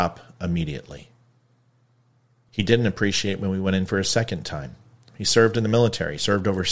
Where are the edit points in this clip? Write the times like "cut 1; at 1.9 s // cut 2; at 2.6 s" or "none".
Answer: cut 1; at 2.5 s // cut 2; at 5.1 s